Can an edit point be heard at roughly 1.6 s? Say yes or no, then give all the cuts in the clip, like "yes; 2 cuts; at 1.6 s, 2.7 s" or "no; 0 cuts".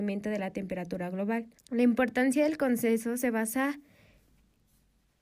yes; 1 cut; at 1.6 s